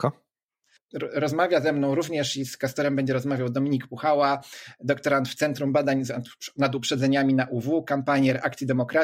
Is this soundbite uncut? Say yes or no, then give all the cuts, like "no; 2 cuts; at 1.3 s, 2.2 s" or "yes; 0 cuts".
yes; 0 cuts